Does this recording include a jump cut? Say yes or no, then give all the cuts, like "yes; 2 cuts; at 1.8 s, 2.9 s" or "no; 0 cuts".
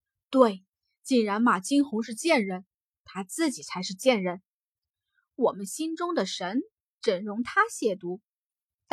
no; 0 cuts